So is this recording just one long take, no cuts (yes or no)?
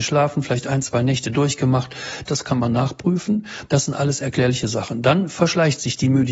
no